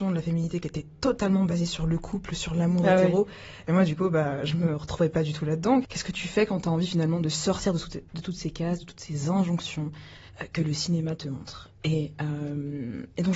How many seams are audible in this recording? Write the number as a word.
zero